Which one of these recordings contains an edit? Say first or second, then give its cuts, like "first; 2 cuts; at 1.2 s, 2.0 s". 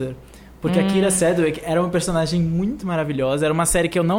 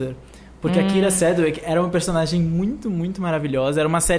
first; 1 cut; at 2.8 s